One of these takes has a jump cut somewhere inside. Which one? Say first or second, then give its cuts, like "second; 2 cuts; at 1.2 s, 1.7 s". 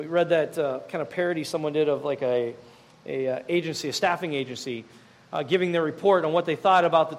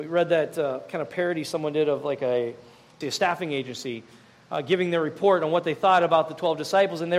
second; 1 cut; at 3.0 s